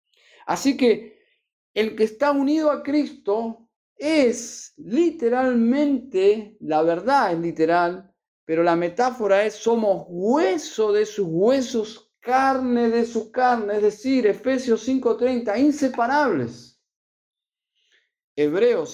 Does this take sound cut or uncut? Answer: uncut